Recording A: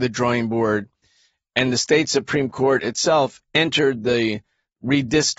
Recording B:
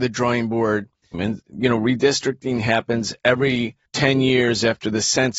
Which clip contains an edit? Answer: B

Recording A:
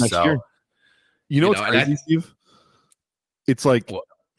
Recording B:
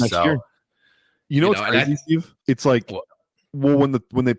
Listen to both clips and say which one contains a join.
B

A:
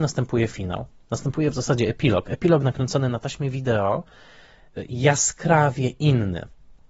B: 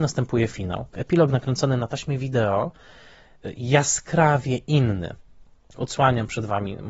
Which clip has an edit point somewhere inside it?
B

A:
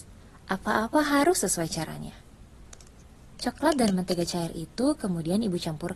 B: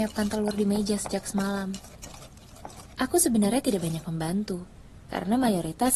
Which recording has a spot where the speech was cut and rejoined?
B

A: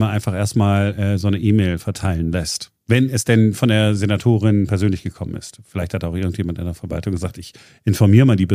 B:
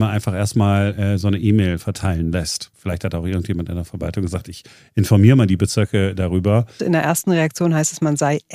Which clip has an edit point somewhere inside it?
B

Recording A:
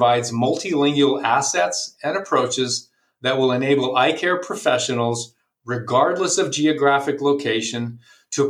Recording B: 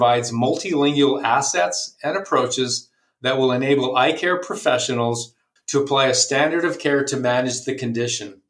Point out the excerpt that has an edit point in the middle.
B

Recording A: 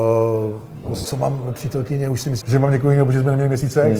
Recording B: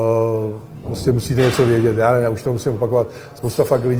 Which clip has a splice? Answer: A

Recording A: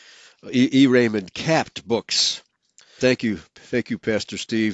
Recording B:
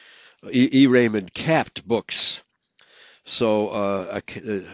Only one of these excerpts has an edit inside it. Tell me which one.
A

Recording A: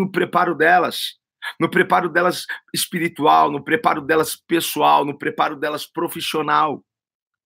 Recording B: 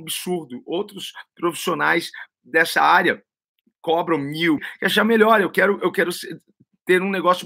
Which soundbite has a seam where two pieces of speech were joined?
B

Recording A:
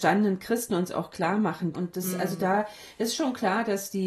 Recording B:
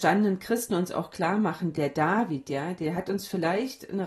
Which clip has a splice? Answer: A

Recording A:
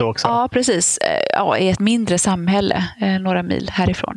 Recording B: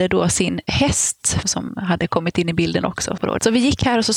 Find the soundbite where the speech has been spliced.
B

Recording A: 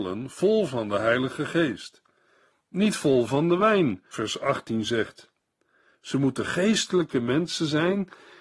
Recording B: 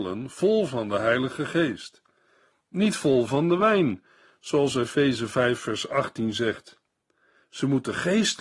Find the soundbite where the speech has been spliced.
A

